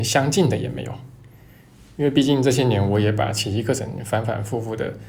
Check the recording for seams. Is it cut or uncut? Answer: uncut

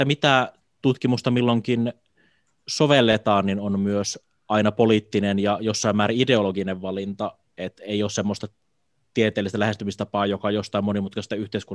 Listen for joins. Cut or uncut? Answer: uncut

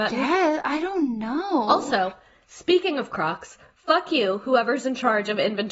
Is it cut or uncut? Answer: uncut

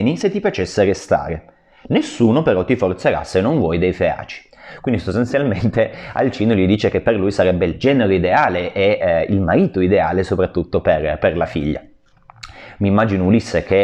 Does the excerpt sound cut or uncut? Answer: uncut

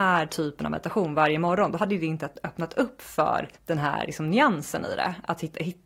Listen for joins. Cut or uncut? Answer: cut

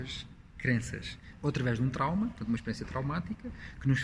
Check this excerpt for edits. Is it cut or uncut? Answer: cut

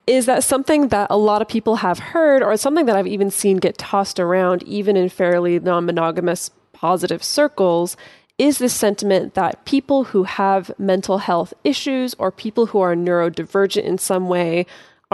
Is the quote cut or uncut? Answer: uncut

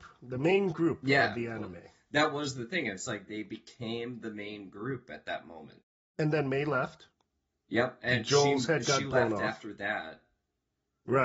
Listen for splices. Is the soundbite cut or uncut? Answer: uncut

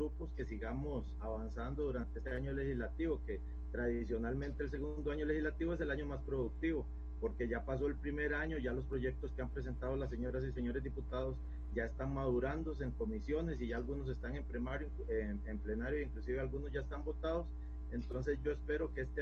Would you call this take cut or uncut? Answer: cut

